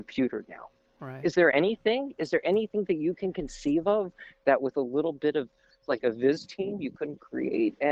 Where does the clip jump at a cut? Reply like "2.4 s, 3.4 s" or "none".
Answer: none